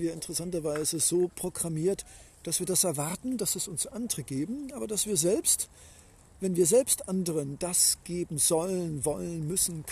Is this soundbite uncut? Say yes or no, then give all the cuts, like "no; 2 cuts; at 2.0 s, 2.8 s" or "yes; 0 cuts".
yes; 0 cuts